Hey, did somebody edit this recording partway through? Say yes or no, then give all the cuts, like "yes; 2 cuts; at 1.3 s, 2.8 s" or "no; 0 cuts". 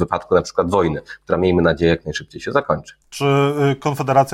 yes; 1 cut; at 3.0 s